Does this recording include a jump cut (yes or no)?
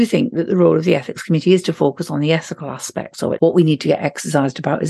yes